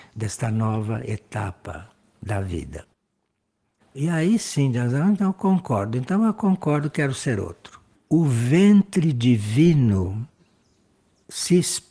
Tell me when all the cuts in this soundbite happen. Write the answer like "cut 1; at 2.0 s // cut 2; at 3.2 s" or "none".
cut 1; at 3.8 s // cut 2; at 7.9 s